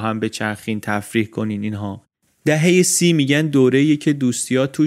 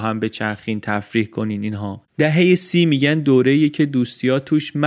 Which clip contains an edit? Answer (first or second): second